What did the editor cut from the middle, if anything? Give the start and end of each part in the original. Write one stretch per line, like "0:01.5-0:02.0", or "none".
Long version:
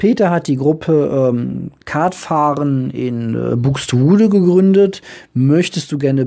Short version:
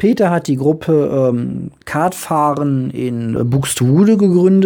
0:03.4-0:03.5